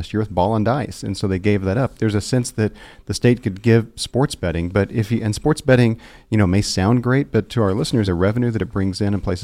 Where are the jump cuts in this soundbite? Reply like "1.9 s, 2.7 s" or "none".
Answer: 8.1 s